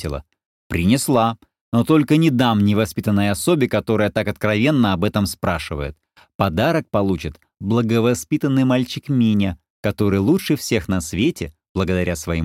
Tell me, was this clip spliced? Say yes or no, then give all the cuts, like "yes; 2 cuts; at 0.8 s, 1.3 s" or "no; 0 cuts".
no; 0 cuts